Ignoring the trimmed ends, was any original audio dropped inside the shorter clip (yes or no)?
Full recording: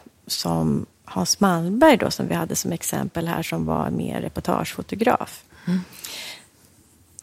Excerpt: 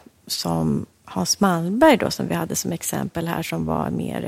no